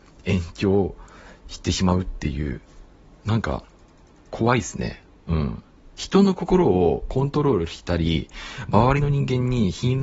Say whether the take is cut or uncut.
uncut